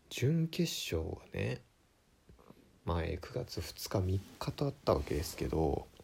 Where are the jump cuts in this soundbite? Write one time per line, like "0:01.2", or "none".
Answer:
none